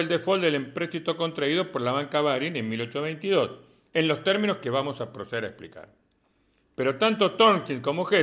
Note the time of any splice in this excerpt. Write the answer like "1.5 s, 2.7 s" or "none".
6.6 s